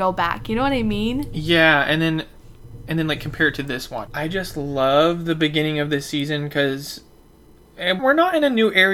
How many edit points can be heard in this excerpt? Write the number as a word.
two